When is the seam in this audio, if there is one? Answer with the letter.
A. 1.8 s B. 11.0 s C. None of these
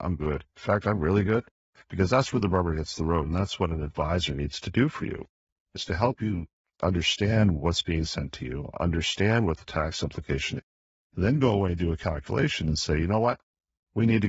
A